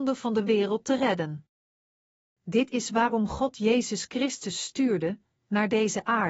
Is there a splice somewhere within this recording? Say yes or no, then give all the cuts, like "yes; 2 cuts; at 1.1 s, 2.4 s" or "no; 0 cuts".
yes; 1 cut; at 5.3 s